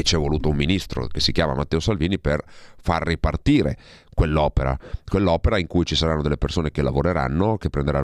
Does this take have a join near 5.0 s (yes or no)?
no